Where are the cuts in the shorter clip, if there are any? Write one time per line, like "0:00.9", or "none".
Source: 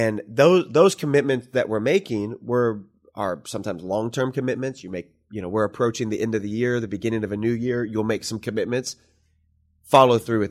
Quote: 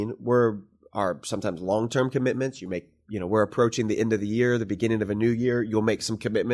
none

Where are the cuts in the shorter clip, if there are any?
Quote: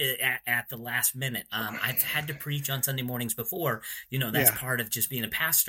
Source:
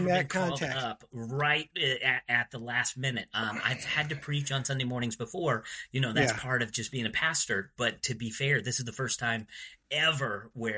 none

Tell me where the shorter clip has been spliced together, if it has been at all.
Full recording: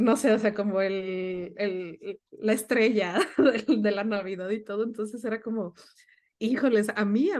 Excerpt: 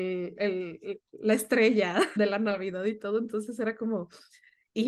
0:02.2

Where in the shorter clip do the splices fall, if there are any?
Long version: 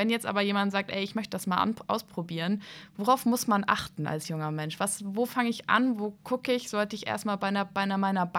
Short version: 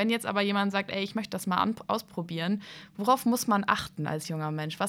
none

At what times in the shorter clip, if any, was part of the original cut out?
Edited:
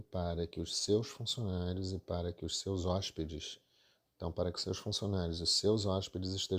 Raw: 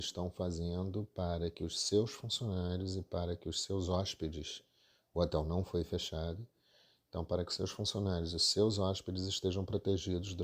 0:04.1

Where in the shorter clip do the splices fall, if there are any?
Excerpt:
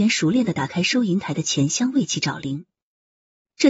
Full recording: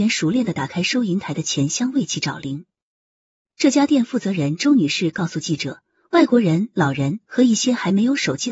none

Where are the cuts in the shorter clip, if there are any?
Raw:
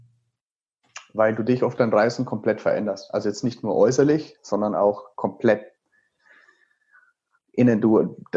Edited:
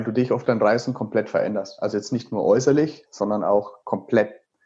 none

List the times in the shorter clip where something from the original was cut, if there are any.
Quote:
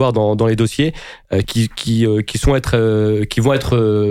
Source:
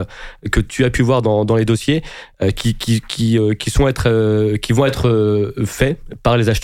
0:01.4

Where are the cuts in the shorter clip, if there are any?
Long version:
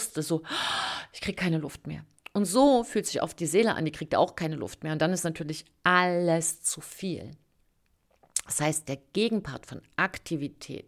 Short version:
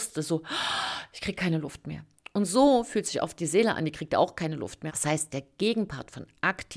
0:04.9

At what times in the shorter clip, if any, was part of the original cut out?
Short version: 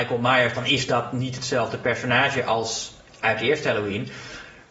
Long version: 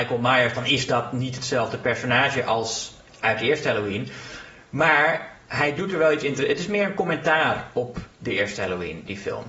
none

